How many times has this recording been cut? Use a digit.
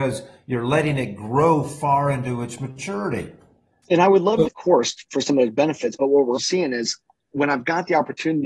2